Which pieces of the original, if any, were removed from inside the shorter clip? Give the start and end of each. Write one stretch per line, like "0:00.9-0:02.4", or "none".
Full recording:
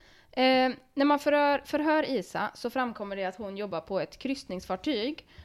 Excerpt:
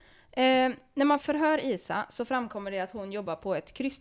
0:01.2-0:01.6